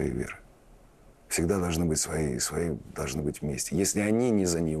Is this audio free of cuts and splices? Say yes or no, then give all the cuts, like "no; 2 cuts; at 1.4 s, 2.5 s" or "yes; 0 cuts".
yes; 0 cuts